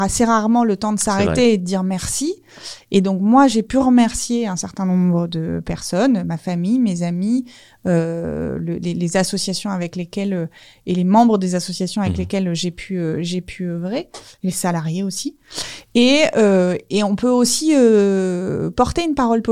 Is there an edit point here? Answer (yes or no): no